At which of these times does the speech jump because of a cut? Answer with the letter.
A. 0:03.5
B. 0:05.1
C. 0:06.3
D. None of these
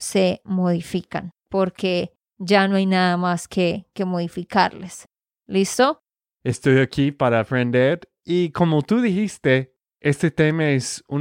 C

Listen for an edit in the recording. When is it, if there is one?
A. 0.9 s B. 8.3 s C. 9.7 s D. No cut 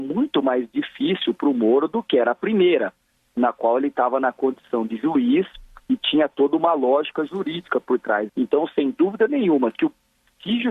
B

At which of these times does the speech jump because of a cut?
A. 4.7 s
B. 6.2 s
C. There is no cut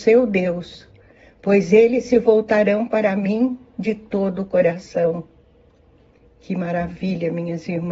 C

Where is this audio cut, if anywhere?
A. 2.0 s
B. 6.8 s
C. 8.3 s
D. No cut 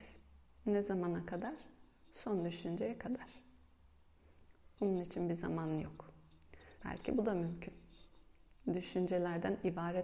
B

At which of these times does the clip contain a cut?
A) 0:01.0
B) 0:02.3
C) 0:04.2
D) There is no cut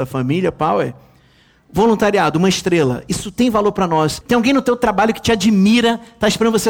C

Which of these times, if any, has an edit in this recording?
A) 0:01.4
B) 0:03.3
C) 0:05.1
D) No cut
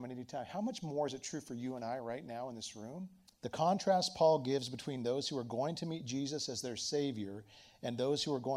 B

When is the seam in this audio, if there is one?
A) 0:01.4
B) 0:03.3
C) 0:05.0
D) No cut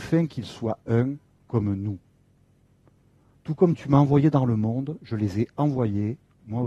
B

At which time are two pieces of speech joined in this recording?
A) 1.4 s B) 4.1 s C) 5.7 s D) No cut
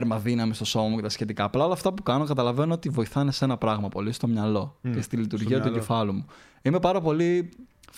D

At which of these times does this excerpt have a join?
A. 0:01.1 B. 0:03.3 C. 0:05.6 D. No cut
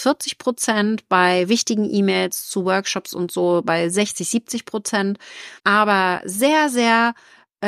C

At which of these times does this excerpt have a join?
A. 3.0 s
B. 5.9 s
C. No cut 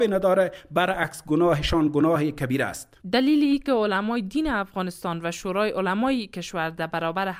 A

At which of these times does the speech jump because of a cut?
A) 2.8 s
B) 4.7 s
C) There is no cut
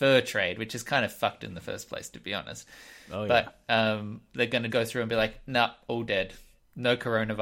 B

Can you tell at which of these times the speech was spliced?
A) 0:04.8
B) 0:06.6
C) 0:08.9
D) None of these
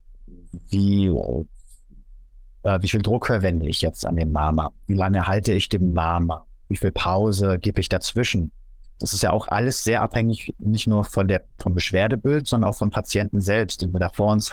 C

